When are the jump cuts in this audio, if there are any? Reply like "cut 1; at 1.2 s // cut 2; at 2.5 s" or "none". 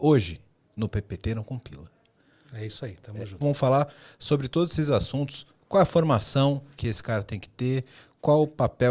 cut 1; at 3.4 s

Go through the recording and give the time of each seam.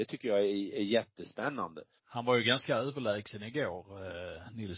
cut 1; at 2.0 s

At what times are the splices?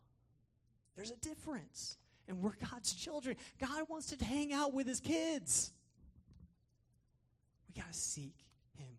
cut 1; at 4.2 s

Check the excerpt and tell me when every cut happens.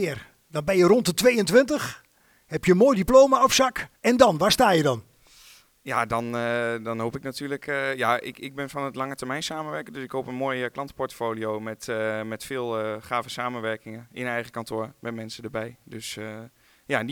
cut 1; at 4.0 s

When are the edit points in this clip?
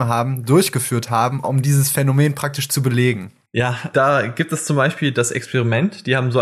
none

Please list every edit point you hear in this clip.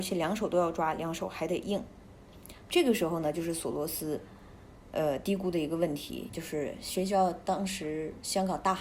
cut 1; at 2.6 s // cut 2; at 6.3 s

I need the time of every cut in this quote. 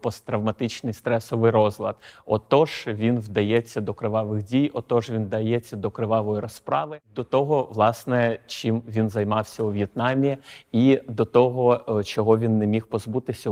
none

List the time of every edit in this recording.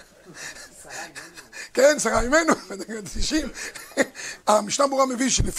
cut 1; at 4.4 s

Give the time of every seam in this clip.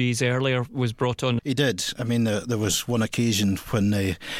cut 1; at 1.4 s

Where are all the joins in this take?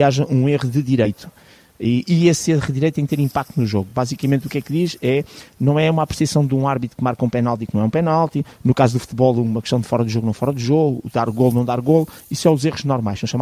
none

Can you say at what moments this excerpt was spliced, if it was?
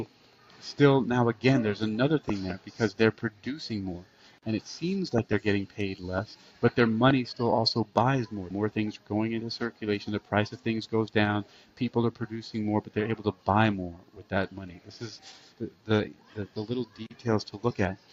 cut 1; at 8.5 s

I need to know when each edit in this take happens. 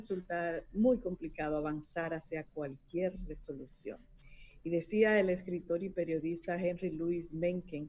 none

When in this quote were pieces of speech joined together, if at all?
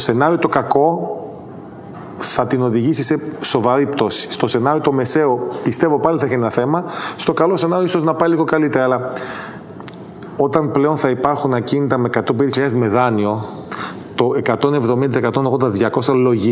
none

